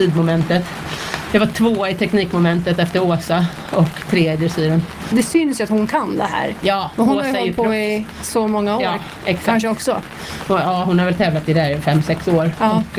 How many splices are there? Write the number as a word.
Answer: zero